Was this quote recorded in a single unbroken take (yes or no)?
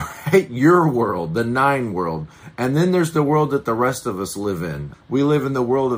no